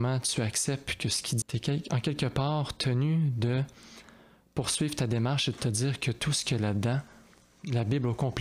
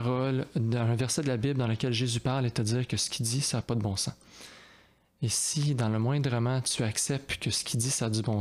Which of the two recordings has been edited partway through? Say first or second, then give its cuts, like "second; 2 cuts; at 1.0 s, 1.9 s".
first; 1 cut; at 1.4 s